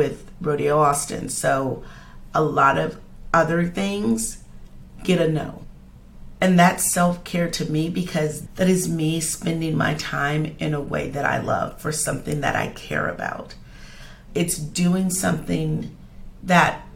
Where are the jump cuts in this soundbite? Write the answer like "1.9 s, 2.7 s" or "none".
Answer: 14.3 s